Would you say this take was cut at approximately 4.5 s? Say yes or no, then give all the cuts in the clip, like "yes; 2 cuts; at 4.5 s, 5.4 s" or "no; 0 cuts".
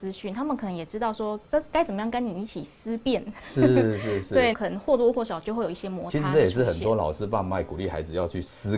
yes; 1 cut; at 4.5 s